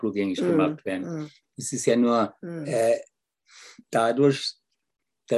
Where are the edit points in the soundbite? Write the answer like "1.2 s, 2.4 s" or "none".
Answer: 1.4 s